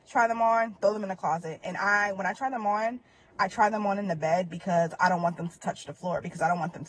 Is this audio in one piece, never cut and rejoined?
yes; 0 cuts

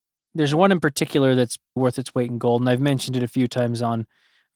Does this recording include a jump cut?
yes; 1 cut; at 1.8 s

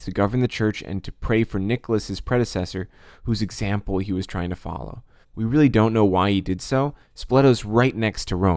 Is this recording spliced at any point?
yes; 2 cuts; at 5.2 s, 7.0 s

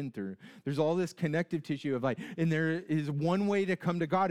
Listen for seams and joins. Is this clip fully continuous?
no; 1 cut; at 2.4 s

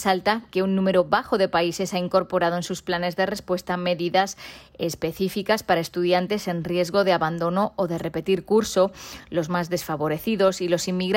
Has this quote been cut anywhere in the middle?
no; 0 cuts

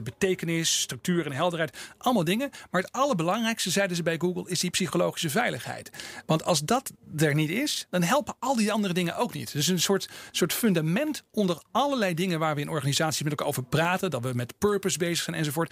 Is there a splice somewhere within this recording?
no; 0 cuts

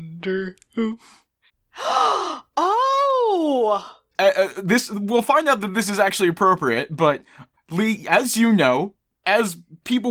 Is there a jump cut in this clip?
yes; 1 cut; at 1.5 s

